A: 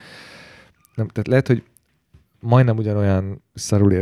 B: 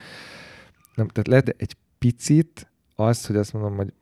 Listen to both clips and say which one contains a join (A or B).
B